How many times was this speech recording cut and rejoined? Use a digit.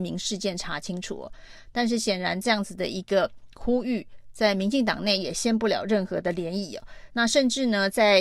1